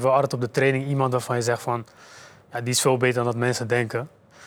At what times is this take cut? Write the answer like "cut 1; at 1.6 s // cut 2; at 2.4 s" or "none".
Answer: none